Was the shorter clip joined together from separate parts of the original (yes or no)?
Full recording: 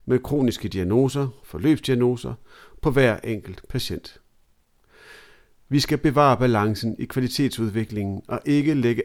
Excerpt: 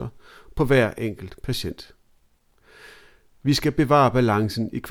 no